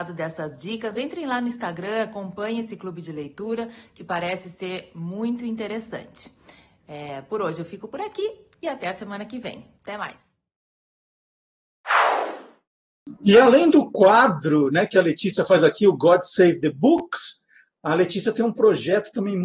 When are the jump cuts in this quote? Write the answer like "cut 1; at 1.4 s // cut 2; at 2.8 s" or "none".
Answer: cut 1; at 9.8 s